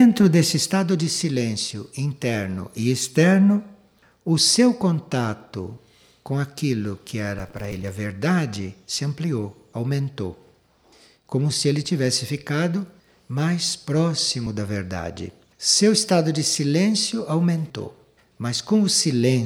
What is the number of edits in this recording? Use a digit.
2